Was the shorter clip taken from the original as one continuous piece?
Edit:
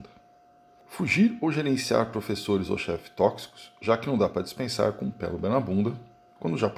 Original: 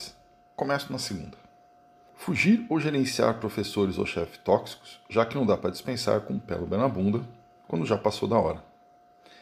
yes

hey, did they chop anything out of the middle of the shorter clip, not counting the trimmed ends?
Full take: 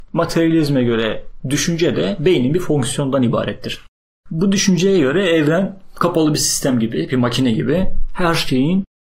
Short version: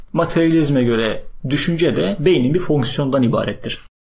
no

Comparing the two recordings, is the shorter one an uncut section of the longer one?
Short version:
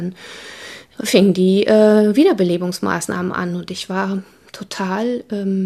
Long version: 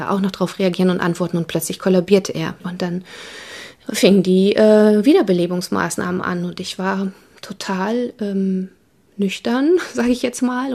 yes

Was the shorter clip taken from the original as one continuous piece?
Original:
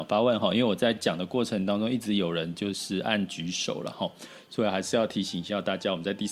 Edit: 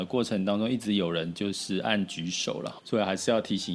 no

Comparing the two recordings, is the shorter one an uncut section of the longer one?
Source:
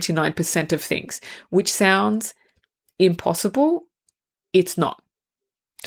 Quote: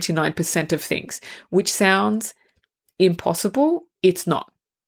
no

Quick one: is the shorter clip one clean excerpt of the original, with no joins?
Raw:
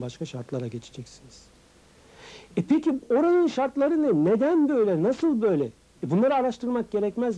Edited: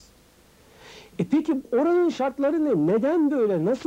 yes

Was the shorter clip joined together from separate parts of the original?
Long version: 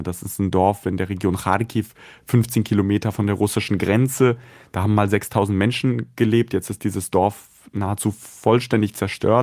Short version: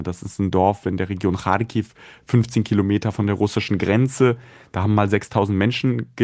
no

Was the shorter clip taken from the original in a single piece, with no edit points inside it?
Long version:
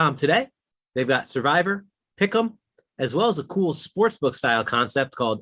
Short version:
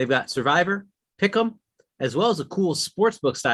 yes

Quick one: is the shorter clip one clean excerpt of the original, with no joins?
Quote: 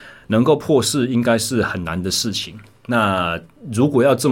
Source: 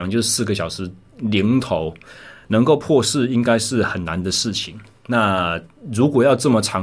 yes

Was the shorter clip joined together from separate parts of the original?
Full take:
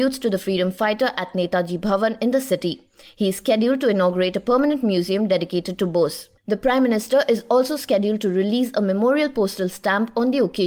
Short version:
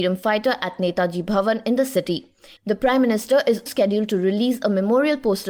yes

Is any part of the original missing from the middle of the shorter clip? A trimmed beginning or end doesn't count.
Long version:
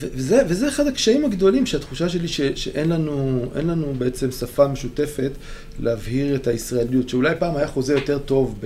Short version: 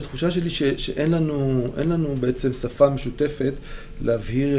no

